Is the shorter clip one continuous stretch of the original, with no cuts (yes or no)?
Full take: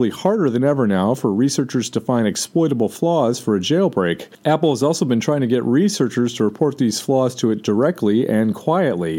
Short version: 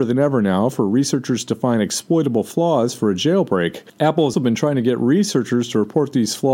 no